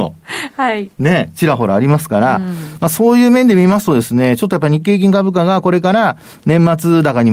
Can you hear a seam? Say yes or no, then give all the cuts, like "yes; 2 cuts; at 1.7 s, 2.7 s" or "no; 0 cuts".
no; 0 cuts